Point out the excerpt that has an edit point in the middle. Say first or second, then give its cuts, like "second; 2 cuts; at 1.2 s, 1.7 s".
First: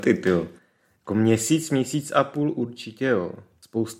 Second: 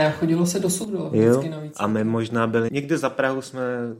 second; 1 cut; at 2.7 s